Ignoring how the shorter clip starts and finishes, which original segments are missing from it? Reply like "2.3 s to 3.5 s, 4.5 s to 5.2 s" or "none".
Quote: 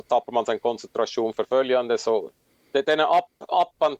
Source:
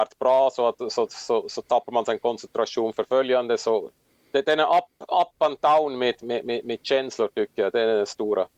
none